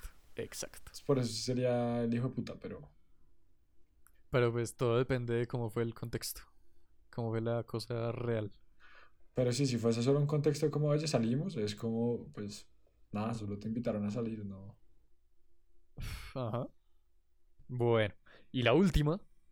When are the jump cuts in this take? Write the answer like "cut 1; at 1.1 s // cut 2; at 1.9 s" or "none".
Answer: none